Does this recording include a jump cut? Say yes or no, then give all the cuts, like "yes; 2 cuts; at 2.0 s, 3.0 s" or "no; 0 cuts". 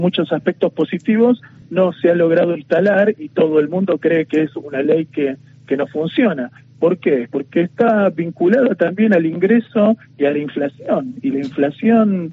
no; 0 cuts